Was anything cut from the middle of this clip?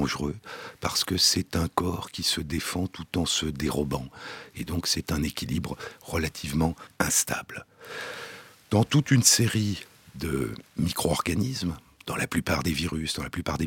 no; 0 cuts

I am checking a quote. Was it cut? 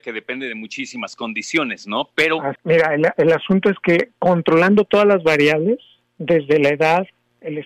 yes; 1 cut; at 2.6 s

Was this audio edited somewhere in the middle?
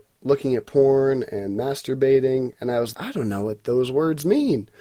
yes; 1 cut; at 2.9 s

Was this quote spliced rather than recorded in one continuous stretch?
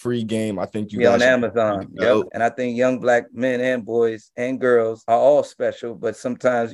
yes; 1 cut; at 2.3 s

